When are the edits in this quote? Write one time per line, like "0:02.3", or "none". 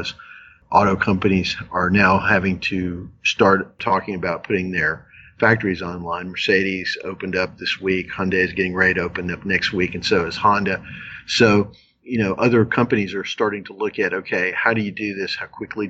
none

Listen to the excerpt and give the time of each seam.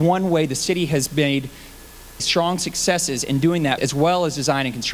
0:02.2
0:03.8

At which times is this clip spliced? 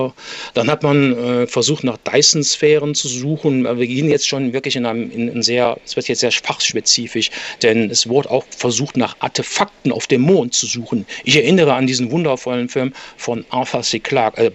none

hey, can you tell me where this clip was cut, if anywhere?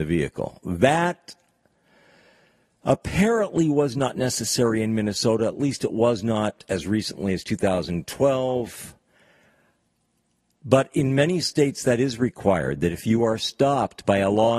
none

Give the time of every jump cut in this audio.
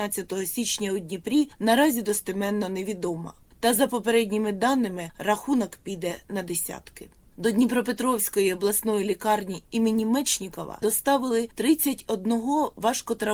none

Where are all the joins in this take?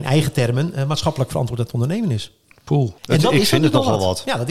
0:03.0

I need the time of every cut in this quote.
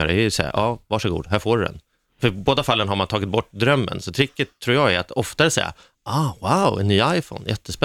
none

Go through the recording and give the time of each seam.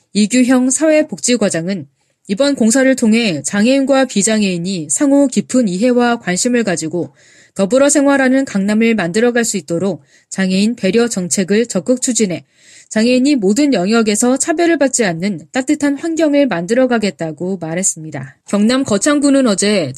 0:18.4

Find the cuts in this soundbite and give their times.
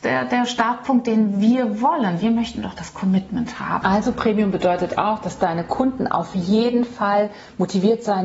0:03.8

